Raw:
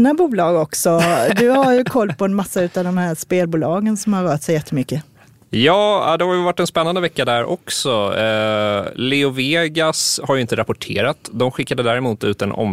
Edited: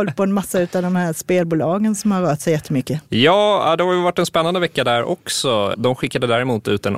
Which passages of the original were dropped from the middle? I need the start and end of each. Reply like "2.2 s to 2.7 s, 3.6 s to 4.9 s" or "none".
5.1 s to 5.5 s, 8.1 s to 11.3 s